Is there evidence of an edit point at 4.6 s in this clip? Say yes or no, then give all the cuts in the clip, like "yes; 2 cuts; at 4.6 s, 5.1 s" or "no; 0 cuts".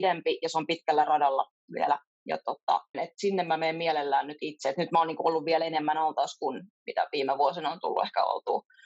no; 1 cut; at 2.9 s